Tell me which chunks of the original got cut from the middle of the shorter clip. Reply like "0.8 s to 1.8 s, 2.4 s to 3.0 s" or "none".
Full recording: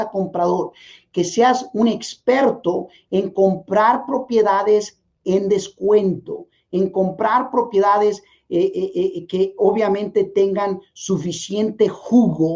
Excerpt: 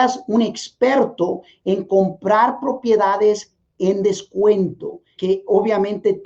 6.6 s to 9.3 s